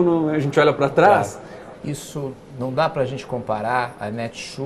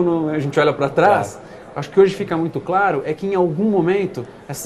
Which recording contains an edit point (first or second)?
first